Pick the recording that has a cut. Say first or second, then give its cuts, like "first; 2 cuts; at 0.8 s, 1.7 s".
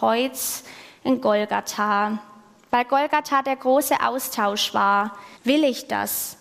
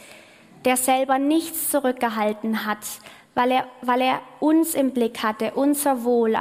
first; 1 cut; at 5.4 s